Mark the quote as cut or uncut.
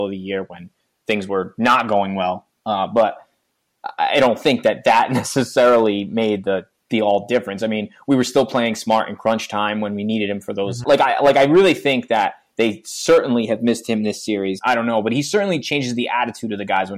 cut